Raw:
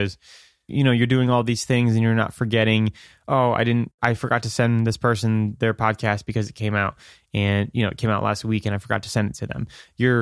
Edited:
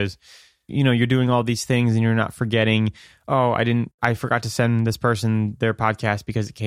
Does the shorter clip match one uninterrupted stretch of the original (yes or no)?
yes